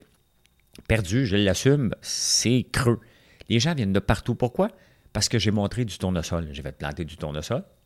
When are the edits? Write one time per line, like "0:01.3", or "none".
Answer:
0:02.0